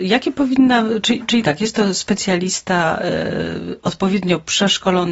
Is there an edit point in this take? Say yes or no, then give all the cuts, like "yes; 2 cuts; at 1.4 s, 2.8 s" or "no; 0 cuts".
no; 0 cuts